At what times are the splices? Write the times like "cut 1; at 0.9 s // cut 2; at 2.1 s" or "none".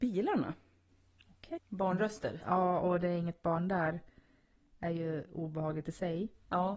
cut 1; at 1.6 s